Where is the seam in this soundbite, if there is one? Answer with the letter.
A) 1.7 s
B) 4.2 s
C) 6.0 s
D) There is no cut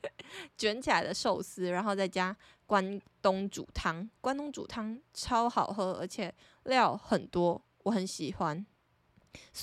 D